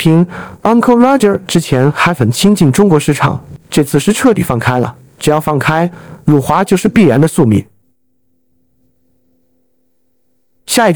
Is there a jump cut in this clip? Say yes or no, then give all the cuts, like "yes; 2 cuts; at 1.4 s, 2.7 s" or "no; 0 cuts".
no; 0 cuts